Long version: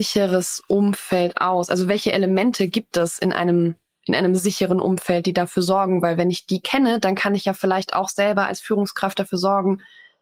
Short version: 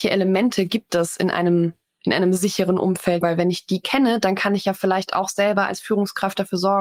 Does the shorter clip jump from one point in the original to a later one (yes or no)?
yes